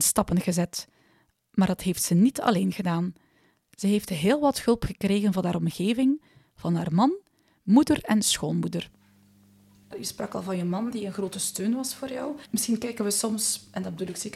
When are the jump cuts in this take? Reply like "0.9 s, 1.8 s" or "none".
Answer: 12.4 s